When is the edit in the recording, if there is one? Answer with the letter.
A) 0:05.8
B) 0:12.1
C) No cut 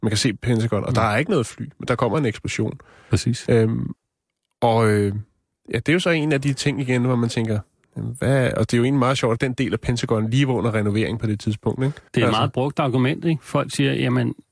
B